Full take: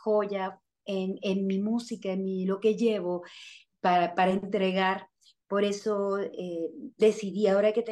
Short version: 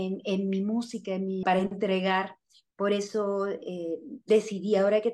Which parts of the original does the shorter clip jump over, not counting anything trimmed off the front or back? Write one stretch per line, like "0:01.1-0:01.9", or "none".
0:02.4-0:04.1